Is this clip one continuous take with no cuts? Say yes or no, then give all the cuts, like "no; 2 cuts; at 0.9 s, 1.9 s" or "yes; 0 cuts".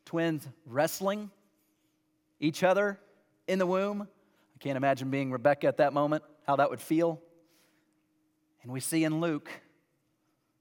yes; 0 cuts